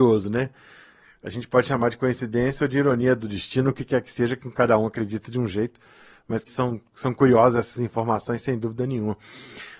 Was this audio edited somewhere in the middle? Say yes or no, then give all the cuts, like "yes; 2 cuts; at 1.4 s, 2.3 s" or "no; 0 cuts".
yes; 1 cut; at 6.5 s